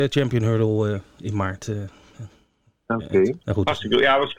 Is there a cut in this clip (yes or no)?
yes